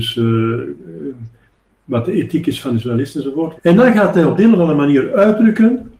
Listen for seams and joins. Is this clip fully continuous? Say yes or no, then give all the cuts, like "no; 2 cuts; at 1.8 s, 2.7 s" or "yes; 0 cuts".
no; 1 cut; at 3.6 s